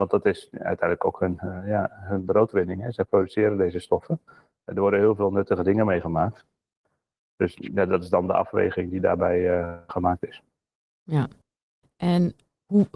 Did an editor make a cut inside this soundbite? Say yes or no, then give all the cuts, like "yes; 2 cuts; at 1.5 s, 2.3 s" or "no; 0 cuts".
no; 0 cuts